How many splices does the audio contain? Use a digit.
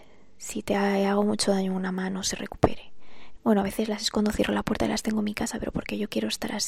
1